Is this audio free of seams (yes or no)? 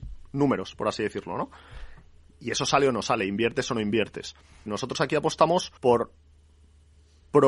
no